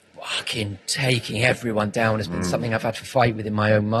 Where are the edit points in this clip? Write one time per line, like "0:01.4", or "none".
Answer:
none